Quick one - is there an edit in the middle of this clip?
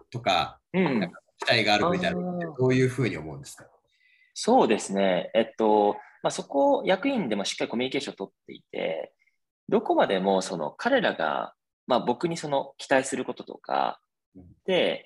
no; 0 cuts

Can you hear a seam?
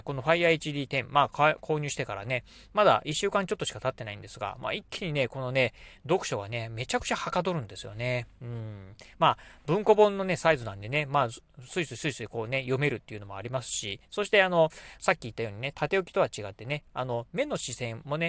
no; 0 cuts

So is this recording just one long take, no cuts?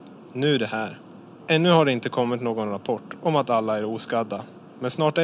yes; 0 cuts

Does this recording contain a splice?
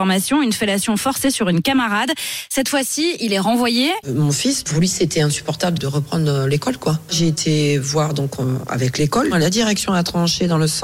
yes; 3 cuts; at 4.0 s, 5.8 s, 7.1 s

